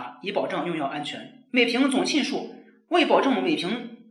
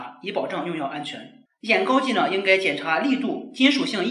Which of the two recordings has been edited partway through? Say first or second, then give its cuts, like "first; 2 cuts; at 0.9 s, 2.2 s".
second; 1 cut; at 1.5 s